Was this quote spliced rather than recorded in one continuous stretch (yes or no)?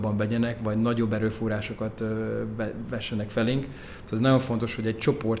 no